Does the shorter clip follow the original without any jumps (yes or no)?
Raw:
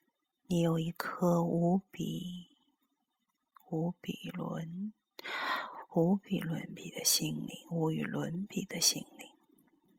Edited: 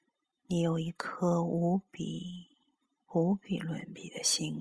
no